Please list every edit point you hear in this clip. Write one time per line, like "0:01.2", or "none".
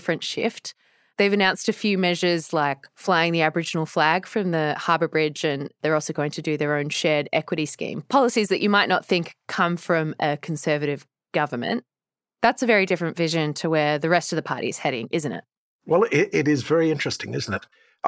none